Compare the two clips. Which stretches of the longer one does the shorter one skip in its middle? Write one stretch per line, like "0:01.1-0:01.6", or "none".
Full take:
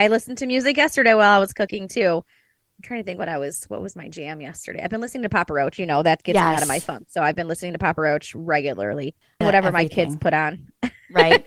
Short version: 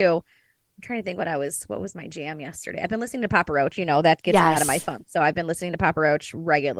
none